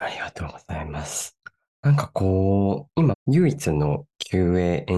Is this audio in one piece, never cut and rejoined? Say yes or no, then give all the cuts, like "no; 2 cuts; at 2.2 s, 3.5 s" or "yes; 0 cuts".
no; 2 cuts; at 1.6 s, 3.1 s